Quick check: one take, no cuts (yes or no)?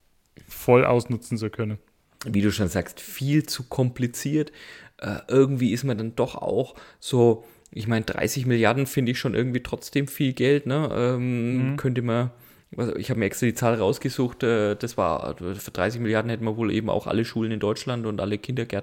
yes